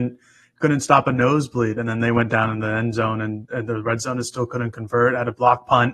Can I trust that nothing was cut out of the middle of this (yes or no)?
yes